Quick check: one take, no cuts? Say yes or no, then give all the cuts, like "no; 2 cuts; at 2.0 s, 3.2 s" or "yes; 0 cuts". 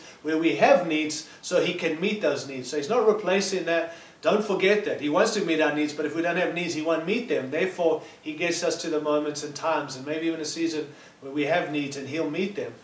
yes; 0 cuts